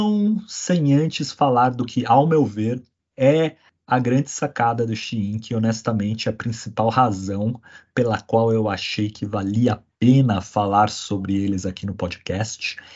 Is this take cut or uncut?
uncut